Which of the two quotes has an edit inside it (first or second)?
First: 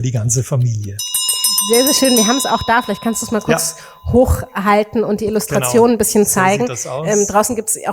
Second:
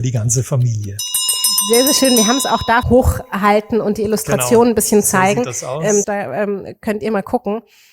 second